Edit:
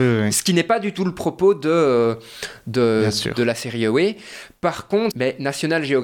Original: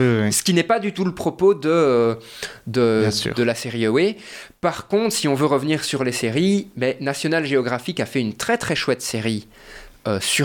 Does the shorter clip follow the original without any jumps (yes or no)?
no